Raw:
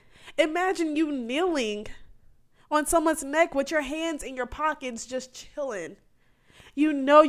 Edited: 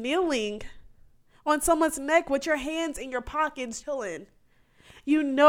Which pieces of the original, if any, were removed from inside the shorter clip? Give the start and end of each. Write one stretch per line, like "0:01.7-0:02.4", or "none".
0:05.1-0:05.5